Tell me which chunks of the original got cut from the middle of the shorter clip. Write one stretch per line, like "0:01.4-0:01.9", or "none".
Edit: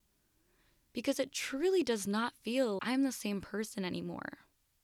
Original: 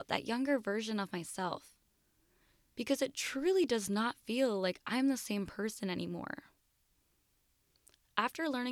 0:04.6-0:04.8